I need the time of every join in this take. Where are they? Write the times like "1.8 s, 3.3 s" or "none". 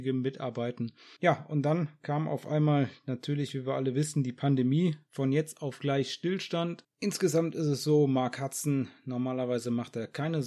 1.2 s, 6.8 s